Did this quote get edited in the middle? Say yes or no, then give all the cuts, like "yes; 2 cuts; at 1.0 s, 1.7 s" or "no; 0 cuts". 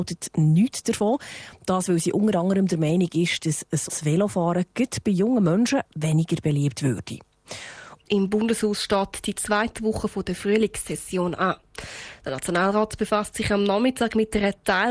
yes; 2 cuts; at 3.9 s, 8.0 s